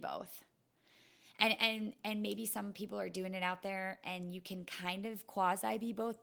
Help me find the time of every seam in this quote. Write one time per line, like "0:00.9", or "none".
none